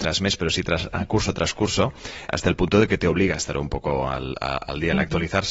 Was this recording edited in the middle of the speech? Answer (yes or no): no